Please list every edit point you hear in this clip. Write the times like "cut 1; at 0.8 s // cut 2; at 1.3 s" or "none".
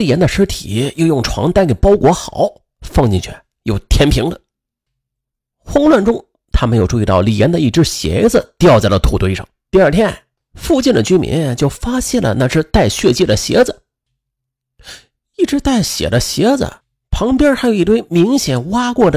cut 1; at 9.7 s